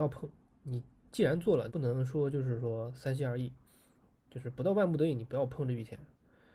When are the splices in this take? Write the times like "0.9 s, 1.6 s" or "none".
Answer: 1.7 s